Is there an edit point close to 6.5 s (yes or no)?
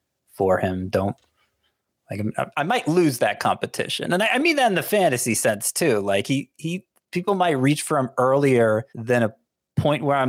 no